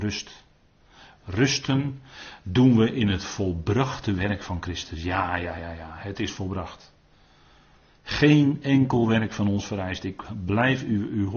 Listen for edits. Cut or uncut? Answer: uncut